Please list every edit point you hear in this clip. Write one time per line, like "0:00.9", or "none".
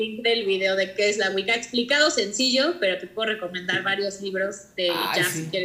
none